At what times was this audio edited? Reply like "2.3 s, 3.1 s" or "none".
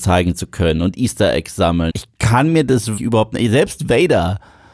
1.9 s, 3.0 s